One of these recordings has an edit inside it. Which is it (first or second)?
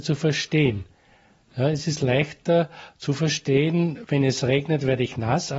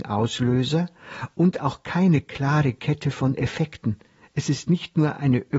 first